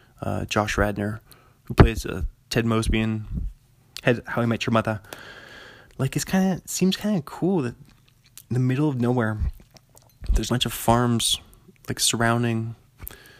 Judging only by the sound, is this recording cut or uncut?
cut